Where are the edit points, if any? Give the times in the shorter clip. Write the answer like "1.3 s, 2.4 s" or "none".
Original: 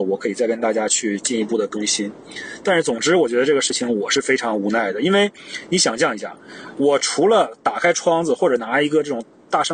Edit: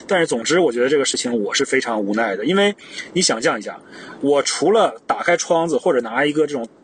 none